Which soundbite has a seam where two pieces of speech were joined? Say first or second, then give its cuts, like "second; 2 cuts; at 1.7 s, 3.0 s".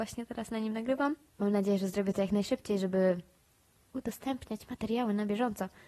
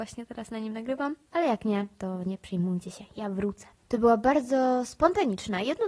second; 2 cuts; at 1.3 s, 3.8 s